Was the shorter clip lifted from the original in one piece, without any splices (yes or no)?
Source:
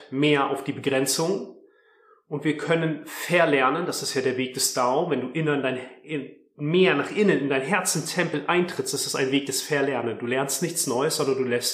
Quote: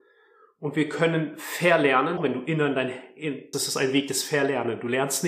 no